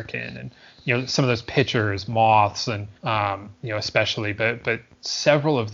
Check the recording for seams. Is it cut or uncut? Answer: cut